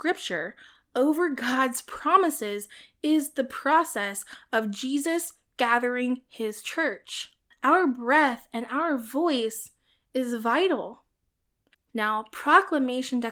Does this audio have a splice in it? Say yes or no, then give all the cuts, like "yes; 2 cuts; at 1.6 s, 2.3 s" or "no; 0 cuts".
yes; 2 cuts; at 7.5 s, 11.7 s